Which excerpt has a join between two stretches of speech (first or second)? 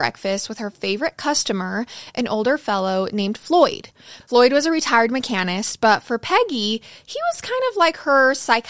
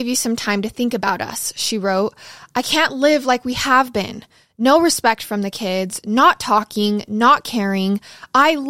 first